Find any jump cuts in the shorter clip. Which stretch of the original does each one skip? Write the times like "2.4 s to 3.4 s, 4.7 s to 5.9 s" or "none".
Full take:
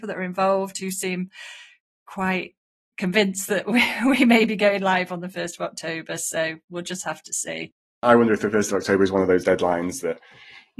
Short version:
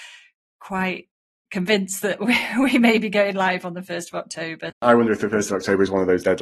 6.2 s to 7.9 s